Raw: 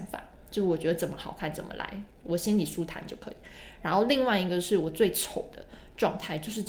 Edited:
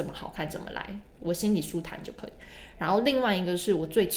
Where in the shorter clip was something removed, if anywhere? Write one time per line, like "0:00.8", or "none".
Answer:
none